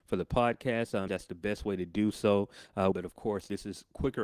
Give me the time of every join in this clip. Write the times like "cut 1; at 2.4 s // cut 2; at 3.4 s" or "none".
cut 1; at 1.1 s // cut 2; at 2.9 s